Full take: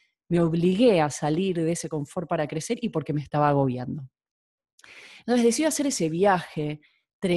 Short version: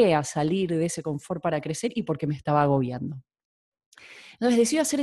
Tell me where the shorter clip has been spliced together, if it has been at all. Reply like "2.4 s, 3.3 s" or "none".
none